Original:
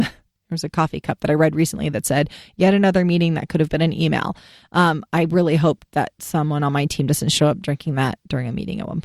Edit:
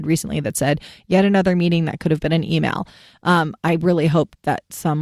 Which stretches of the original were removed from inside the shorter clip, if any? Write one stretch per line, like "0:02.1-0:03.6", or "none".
none